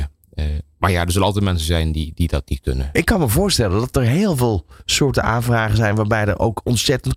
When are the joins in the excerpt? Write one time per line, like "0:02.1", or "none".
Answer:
0:02.9

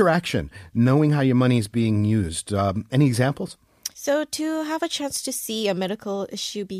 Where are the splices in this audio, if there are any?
0:03.9

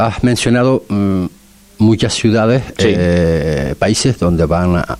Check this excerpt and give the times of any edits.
none

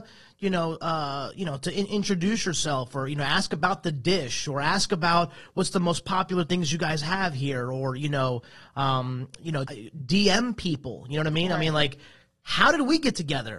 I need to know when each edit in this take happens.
0:09.6

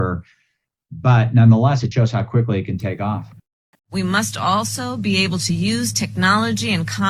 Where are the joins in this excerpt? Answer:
0:01.9
0:03.7

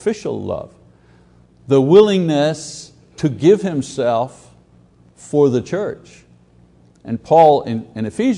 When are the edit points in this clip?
none

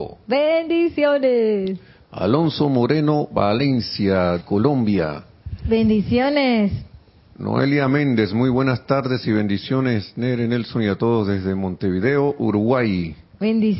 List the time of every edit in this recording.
0:04.4

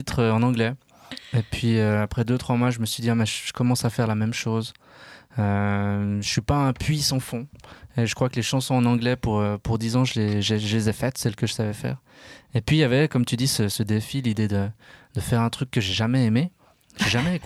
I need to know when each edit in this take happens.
none

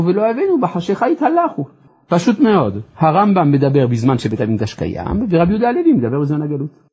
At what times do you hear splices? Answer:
none

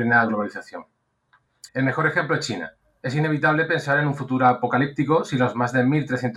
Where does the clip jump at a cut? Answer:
0:01.7

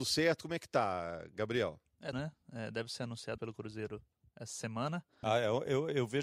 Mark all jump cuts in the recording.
0:02.1
0:03.4
0:05.2

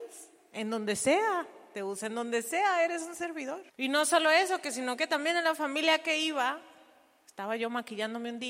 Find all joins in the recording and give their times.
0:03.7

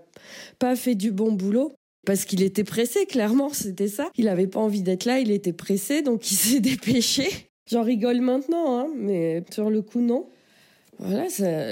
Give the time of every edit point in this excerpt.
none

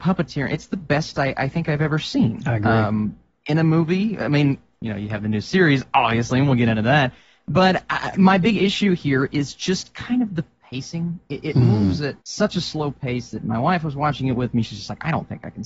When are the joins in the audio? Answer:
0:12.2
0:14.6

